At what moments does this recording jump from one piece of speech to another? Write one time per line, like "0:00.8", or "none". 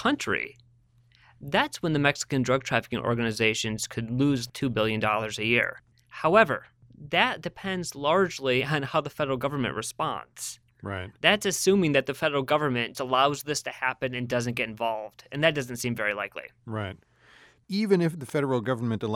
0:12.9